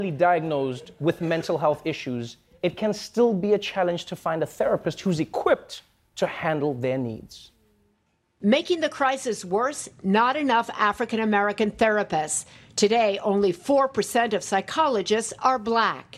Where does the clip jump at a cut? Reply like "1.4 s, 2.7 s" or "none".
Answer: none